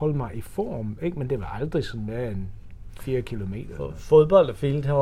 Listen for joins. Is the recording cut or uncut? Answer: uncut